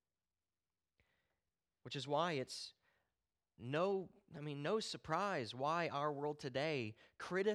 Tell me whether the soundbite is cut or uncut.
uncut